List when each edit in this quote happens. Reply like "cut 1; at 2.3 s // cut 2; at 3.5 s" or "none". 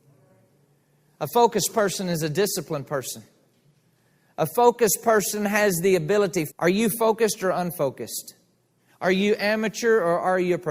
cut 1; at 6.5 s // cut 2; at 8.9 s